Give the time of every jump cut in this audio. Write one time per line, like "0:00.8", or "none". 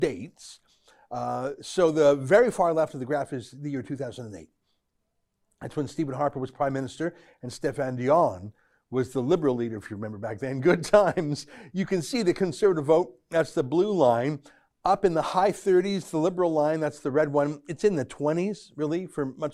none